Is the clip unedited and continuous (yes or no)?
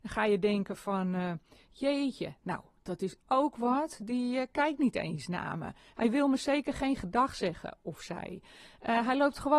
yes